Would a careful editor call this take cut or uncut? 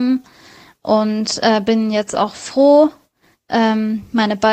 uncut